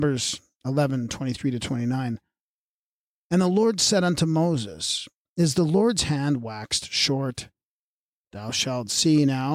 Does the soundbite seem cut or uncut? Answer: uncut